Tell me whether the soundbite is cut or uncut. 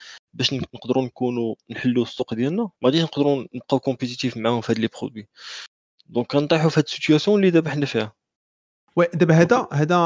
cut